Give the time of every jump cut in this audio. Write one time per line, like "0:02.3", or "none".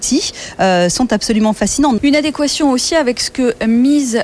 0:02.0